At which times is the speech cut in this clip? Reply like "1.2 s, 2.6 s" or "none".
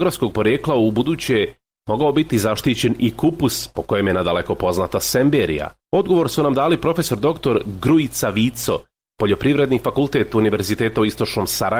5.8 s